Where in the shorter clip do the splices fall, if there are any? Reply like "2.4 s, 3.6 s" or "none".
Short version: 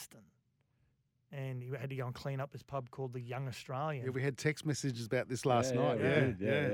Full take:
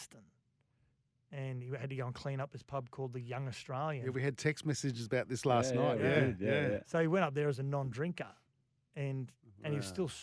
none